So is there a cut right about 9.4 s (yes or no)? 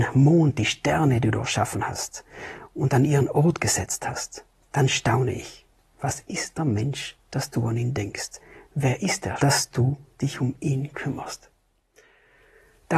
yes